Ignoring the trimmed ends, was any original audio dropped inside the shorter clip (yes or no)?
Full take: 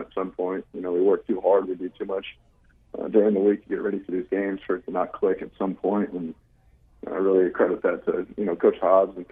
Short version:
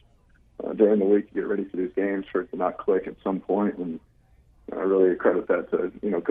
no